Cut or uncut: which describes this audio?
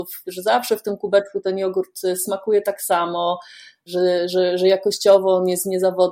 uncut